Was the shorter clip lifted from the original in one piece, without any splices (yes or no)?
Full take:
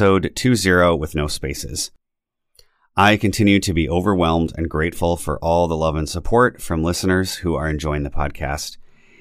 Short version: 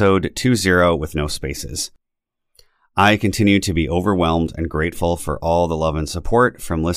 yes